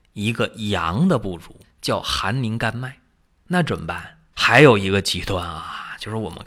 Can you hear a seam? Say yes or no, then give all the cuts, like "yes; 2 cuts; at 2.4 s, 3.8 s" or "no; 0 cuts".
yes; 2 cuts; at 1.6 s, 4.3 s